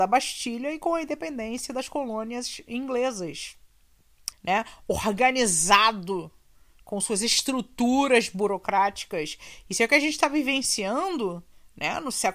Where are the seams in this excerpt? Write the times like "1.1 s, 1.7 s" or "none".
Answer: 4.3 s